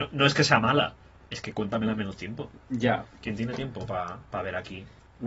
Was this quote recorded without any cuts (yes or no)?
yes